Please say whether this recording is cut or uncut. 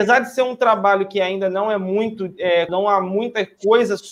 cut